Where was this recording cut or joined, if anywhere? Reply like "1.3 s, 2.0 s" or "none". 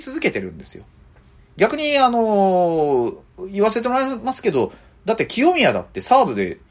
1.4 s